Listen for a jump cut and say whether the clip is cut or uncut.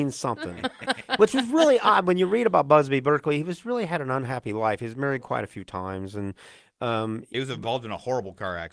uncut